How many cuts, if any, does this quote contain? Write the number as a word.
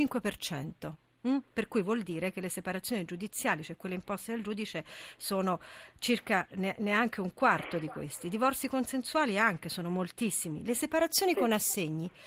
zero